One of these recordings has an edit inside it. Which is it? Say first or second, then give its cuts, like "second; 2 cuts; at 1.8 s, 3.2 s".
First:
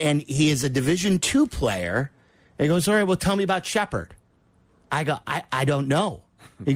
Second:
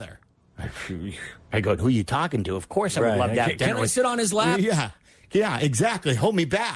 second; 1 cut; at 1.8 s